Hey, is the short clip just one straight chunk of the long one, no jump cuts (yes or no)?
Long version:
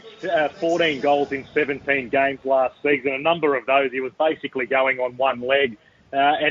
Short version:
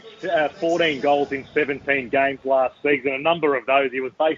yes